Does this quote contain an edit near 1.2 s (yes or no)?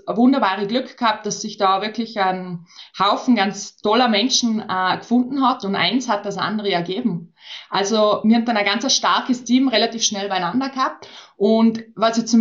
no